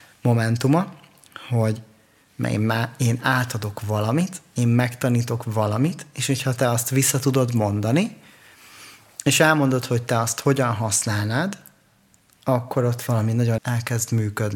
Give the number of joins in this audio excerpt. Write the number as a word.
one